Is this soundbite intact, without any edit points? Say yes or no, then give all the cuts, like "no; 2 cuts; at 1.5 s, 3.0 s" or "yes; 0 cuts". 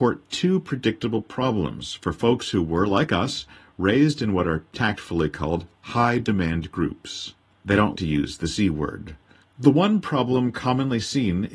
no; 1 cut; at 7.9 s